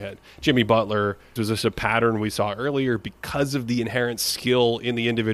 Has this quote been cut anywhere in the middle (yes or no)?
yes